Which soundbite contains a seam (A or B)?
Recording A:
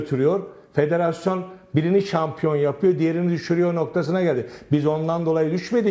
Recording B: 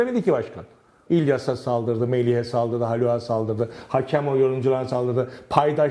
B